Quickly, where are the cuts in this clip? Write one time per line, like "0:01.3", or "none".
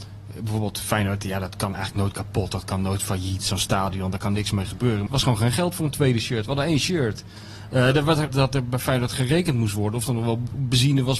0:05.1
0:08.3